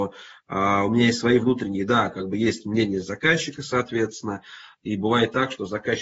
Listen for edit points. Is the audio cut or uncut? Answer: uncut